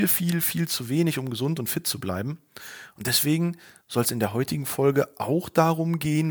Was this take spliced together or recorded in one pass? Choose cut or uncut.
uncut